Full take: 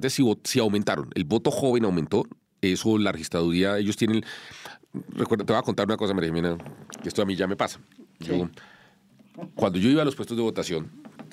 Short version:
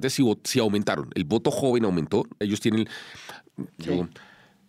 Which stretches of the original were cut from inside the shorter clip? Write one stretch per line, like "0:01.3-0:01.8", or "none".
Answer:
0:02.4-0:03.8
0:05.1-0:08.1